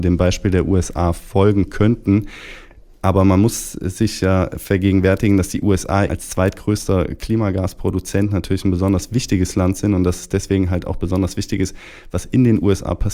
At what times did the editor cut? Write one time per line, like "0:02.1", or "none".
0:06.1

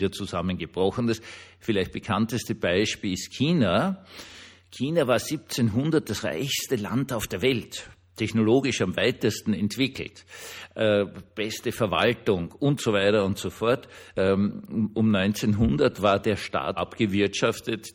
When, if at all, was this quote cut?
0:14.1
0:16.8

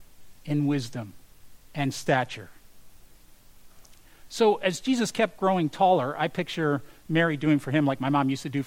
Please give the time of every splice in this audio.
none

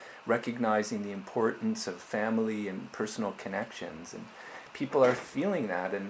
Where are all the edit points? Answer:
none

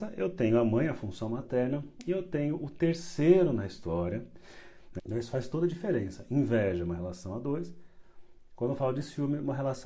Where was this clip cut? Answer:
0:05.0

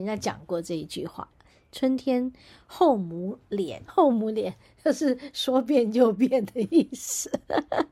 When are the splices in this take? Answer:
0:03.9

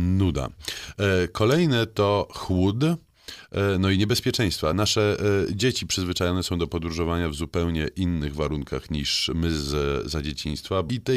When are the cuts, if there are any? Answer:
none

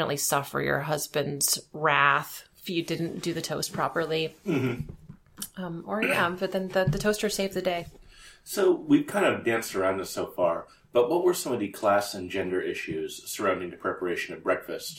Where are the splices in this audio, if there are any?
none

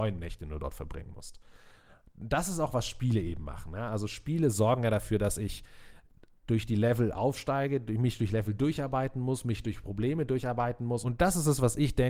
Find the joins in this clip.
0:11.0

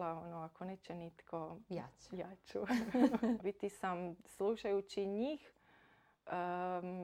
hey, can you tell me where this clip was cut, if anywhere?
0:03.4

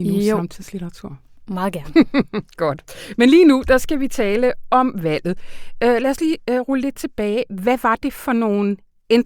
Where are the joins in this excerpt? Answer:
none

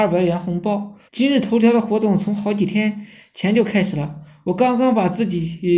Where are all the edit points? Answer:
0:01.1

